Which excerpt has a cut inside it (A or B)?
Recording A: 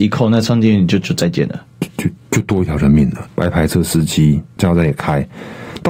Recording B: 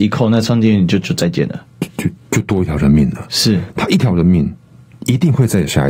A